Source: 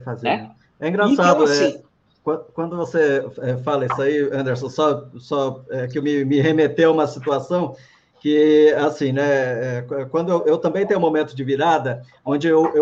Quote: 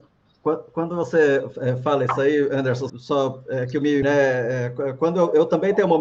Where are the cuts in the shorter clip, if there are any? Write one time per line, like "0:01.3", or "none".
0:02.9
0:04.0